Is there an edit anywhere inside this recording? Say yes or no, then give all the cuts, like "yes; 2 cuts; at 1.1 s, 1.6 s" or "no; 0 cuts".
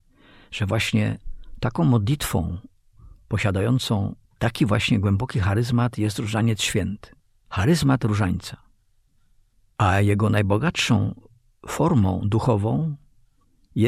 no; 0 cuts